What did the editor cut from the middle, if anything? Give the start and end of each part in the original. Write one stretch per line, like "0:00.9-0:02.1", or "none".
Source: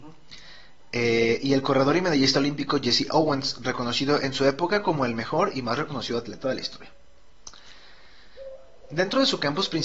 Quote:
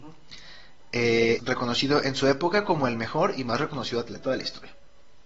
0:01.4-0:03.6

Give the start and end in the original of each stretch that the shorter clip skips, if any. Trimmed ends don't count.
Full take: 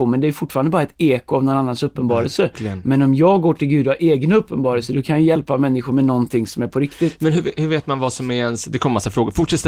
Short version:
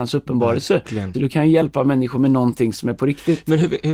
0:02.8-0:04.9

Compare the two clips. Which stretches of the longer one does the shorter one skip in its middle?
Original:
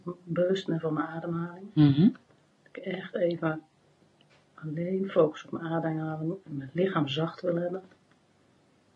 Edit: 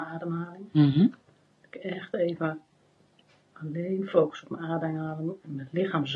none

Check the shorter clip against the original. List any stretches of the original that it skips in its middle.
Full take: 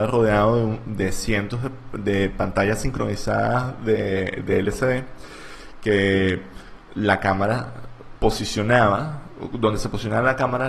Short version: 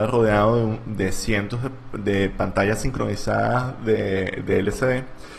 none

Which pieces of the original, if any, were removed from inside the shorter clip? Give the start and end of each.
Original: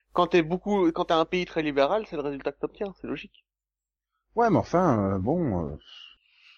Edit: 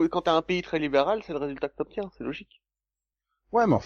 none

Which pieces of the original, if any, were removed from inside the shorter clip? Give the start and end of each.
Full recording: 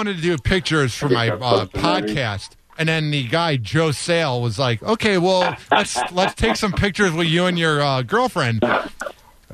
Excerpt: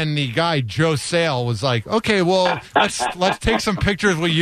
none

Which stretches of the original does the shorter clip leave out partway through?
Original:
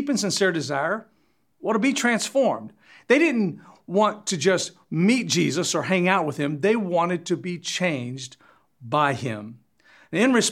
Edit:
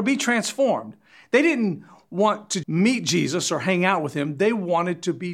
0:04.4-0:04.9

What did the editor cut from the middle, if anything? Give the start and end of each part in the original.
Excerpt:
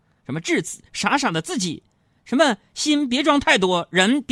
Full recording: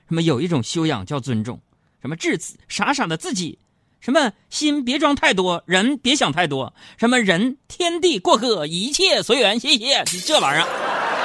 none

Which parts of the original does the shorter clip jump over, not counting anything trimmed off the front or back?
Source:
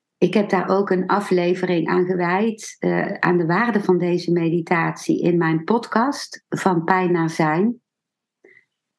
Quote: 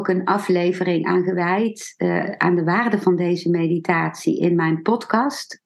none

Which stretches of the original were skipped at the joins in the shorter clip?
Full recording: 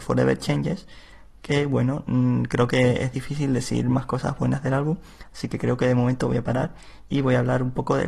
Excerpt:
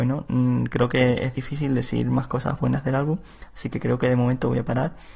none

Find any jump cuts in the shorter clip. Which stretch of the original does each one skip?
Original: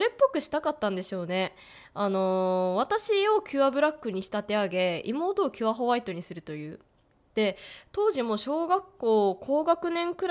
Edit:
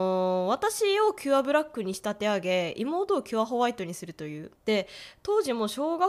0:06.8-0:07.3

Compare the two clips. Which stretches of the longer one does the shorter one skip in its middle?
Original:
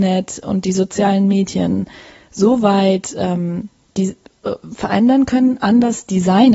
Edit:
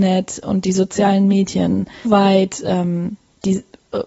0:02.0-0:02.6

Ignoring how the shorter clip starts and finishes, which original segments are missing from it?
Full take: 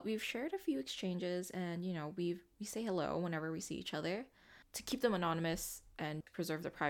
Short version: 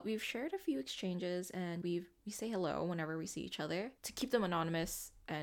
0:01.8-0:02.2
0:04.3-0:04.7

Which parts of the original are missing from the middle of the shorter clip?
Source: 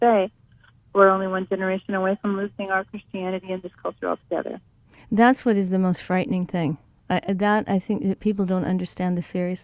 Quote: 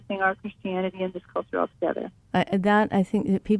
0:04.7-0:07.0

